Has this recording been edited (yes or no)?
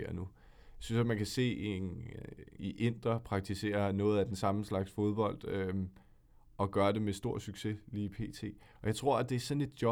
yes